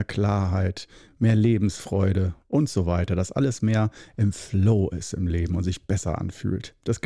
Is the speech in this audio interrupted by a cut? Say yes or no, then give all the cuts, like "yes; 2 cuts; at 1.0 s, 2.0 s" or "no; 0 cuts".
no; 0 cuts